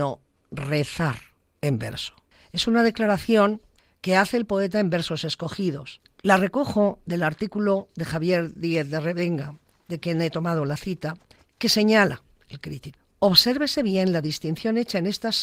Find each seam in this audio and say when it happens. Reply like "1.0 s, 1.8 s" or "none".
none